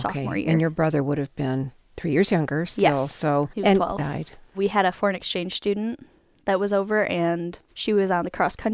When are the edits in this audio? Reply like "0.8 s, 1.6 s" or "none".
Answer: 4.0 s